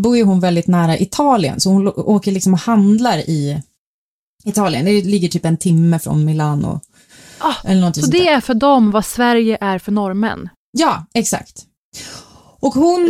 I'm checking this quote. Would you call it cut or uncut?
uncut